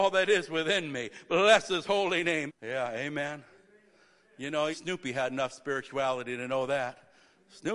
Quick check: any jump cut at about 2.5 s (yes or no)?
yes